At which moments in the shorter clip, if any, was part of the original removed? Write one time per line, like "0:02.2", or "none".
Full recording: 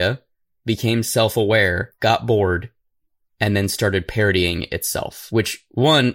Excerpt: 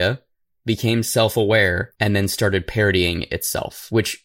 0:01.9